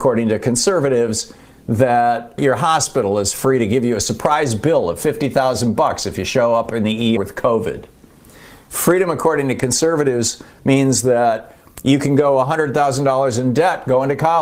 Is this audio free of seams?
no; 1 cut; at 7.2 s

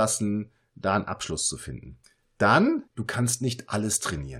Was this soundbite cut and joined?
yes; 1 cut; at 2.9 s

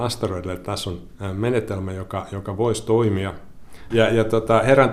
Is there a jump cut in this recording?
yes; 1 cut; at 3.9 s

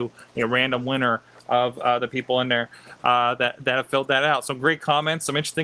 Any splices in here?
no; 0 cuts

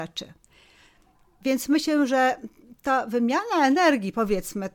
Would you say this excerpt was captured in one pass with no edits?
yes; 0 cuts

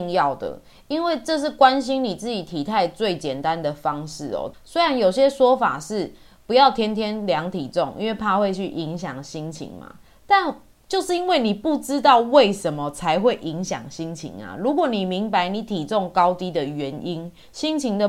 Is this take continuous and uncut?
no; 1 cut; at 4.5 s

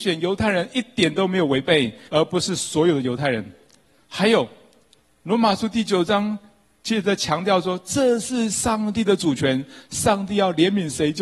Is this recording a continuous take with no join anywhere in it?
no; 1 cut; at 2.1 s

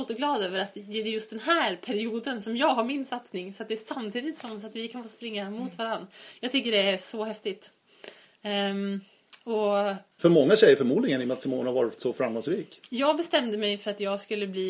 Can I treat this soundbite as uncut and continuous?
no; 2 cuts; at 10.2 s, 12.8 s

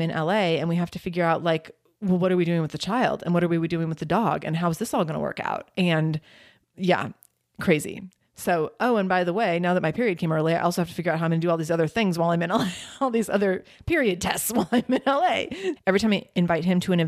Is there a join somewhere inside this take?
yes; 1 cut; at 15.8 s

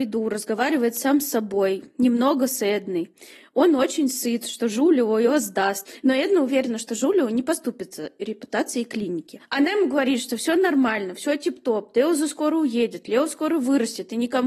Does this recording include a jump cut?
no; 0 cuts

